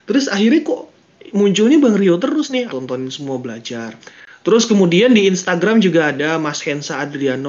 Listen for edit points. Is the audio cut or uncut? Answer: cut